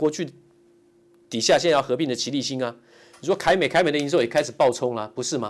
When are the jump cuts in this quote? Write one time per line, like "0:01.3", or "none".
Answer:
none